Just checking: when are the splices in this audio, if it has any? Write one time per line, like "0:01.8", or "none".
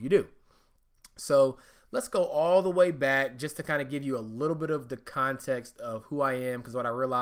none